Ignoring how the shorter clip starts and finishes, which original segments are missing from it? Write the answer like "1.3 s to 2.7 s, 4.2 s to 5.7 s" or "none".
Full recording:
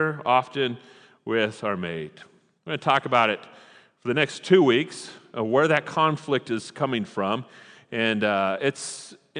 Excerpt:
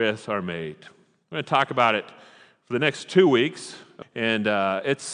5.4 s to 7.8 s